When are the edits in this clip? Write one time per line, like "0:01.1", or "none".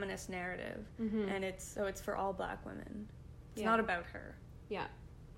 none